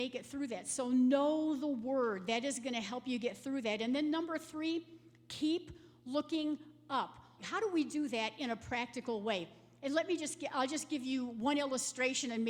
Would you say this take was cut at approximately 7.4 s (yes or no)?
yes